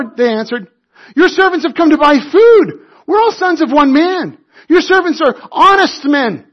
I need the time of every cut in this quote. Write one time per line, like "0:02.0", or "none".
none